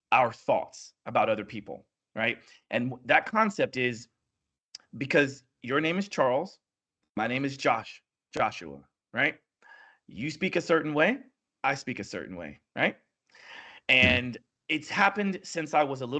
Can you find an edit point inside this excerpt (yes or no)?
no